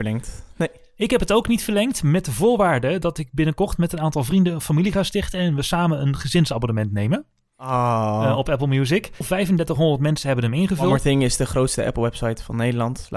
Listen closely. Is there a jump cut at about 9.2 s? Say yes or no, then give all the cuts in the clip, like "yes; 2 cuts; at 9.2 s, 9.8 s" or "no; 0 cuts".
yes; 1 cut; at 9.2 s